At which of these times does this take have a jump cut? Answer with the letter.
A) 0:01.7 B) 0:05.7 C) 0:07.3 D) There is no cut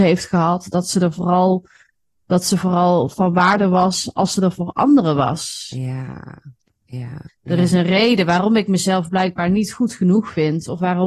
C